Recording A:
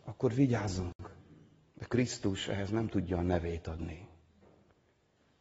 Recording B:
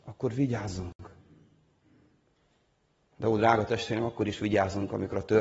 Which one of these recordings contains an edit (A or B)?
A